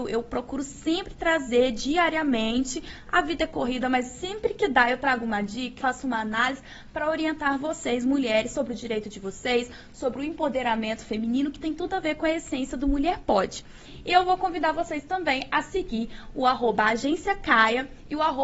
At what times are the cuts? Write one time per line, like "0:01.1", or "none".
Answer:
0:05.8